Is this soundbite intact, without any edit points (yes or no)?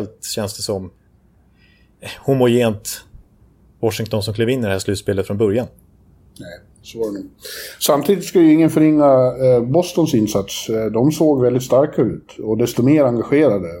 yes